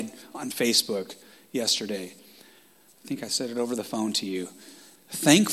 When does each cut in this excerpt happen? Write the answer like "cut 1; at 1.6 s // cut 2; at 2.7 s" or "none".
none